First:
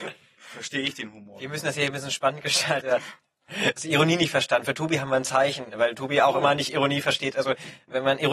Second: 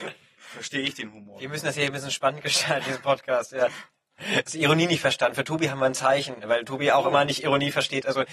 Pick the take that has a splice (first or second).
first